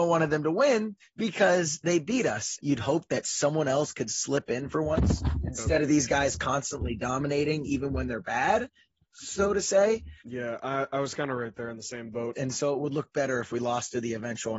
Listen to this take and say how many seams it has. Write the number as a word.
three